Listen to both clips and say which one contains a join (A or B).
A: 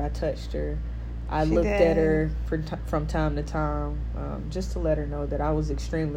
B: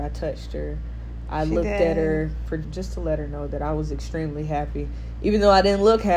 B